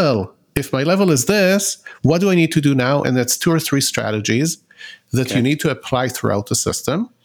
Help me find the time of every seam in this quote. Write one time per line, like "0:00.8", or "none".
none